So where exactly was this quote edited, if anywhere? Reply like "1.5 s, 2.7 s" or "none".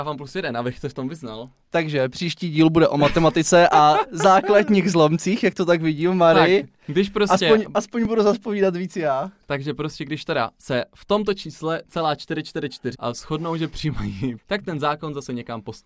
12.9 s, 14.4 s